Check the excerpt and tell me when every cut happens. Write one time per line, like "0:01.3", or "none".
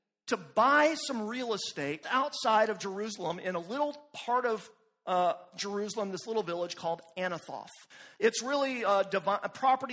0:02.0